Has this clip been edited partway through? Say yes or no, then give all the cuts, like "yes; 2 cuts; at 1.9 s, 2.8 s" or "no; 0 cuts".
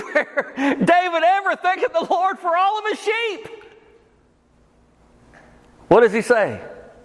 no; 0 cuts